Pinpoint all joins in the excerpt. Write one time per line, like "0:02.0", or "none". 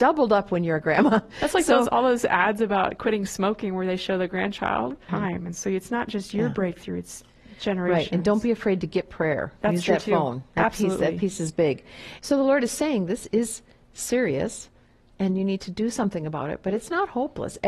0:05.1